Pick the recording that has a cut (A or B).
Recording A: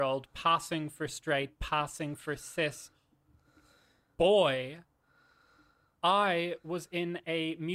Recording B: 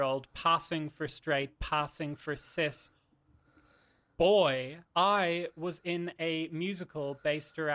B